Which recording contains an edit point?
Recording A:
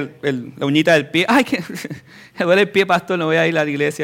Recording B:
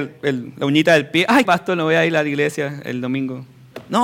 B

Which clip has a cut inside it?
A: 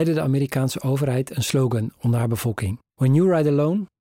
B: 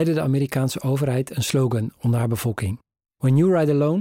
A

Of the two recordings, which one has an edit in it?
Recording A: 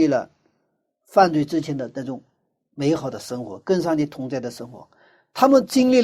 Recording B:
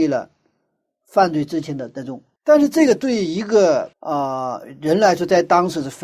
B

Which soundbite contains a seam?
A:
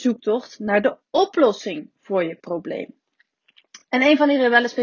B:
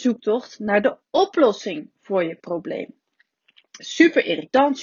B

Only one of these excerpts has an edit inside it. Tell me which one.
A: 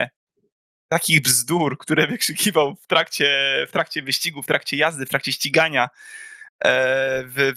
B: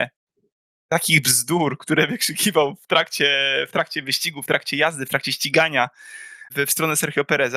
B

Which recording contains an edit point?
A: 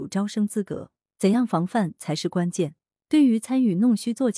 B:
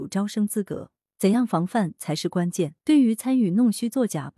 B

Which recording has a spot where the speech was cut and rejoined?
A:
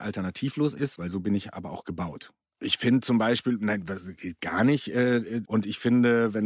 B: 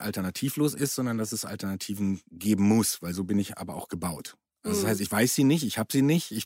A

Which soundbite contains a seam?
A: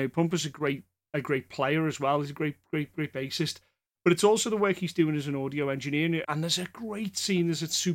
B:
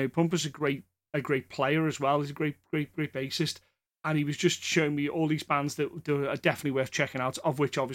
A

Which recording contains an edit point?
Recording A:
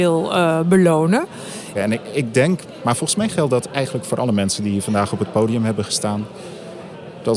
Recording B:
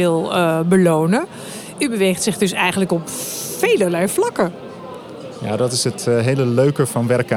A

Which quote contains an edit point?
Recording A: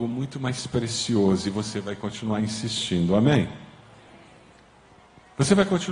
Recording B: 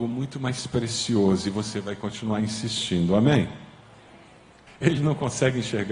B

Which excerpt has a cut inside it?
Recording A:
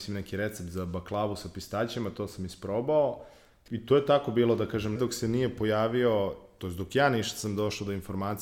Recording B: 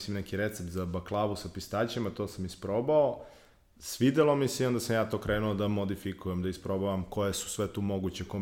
A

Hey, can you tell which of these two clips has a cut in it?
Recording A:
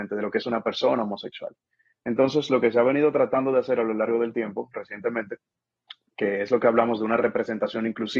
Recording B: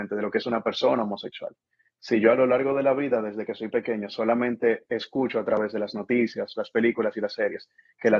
B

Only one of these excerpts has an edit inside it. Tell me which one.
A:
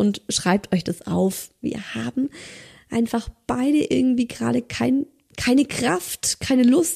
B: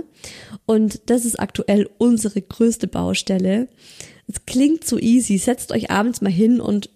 A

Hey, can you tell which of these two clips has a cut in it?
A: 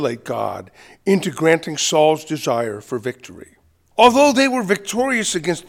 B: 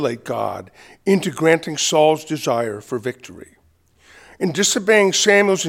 A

